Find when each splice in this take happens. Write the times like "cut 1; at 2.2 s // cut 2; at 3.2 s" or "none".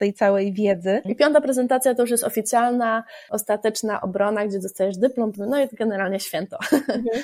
cut 1; at 1.0 s // cut 2; at 5.3 s